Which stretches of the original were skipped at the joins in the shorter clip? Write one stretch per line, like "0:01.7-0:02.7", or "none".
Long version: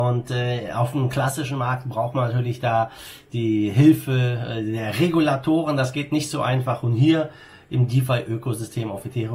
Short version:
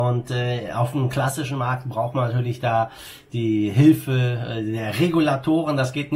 none

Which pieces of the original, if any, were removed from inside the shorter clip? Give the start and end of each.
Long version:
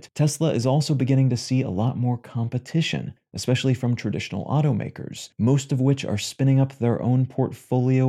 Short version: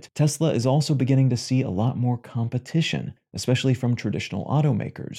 none

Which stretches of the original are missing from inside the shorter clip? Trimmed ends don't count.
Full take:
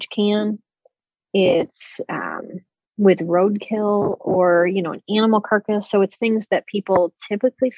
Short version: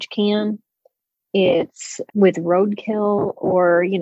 0:02.1-0:02.9

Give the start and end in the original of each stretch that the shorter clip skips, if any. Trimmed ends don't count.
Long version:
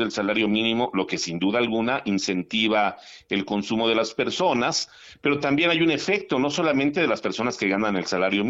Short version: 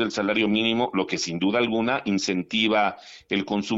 none

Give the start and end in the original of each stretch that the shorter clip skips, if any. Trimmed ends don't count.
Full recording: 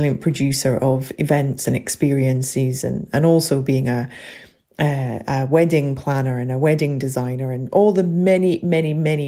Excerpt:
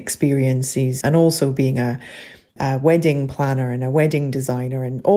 0:02.8-0:03.1
0:04.7-0:05.2

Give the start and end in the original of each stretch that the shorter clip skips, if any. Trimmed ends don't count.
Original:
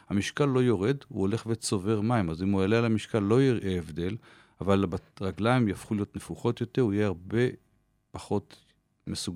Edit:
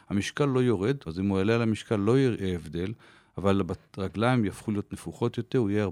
0:01.1-0:02.3

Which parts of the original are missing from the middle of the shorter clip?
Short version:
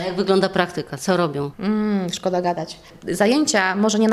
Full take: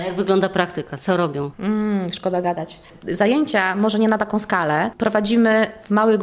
none

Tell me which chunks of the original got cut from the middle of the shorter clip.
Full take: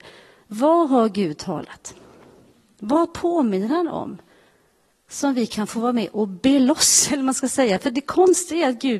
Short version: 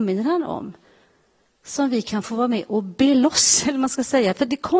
none

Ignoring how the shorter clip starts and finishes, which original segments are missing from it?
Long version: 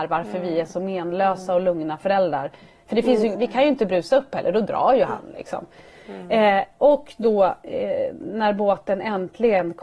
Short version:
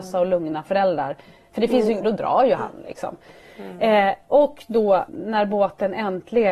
0:03.4-0:04.5
0:07.6-0:08.2

